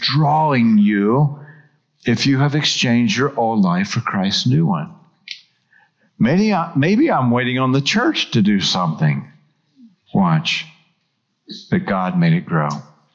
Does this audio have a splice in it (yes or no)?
yes